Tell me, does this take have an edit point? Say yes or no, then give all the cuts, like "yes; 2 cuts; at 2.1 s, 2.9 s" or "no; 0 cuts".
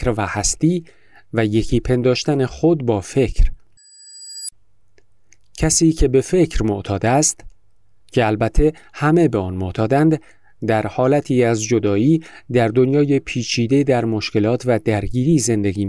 no; 0 cuts